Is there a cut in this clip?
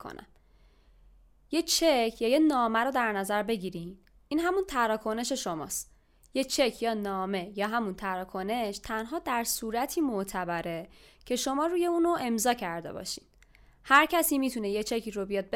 no; 0 cuts

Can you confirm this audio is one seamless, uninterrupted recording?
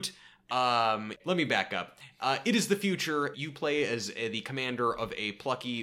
no; 2 cuts; at 1.2 s, 3.3 s

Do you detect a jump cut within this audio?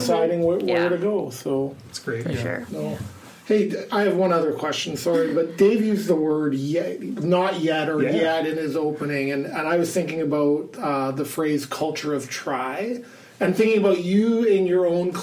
no; 0 cuts

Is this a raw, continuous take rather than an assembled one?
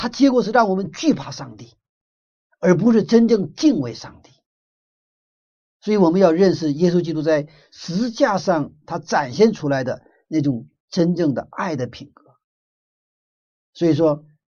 yes; 0 cuts

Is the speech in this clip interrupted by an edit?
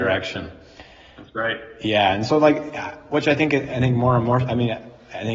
no; 0 cuts

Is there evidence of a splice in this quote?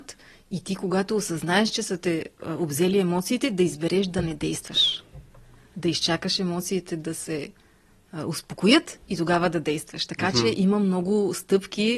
no; 0 cuts

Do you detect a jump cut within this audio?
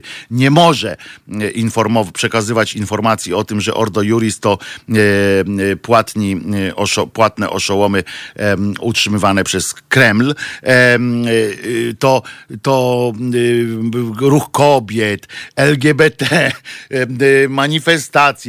no; 0 cuts

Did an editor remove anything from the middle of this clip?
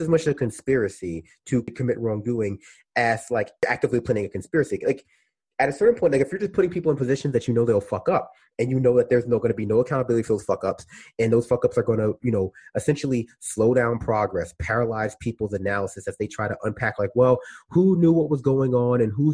no; 0 cuts

